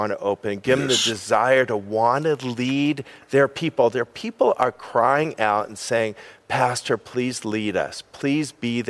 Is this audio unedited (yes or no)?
yes